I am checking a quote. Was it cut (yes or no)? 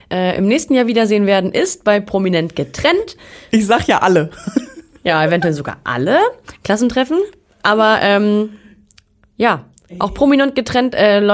no